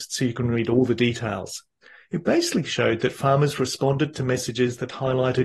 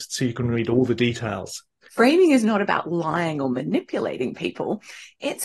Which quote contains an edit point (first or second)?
second